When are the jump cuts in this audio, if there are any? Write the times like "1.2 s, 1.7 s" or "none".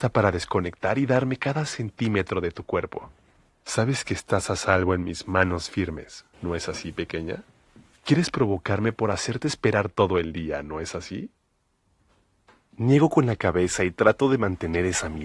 6.3 s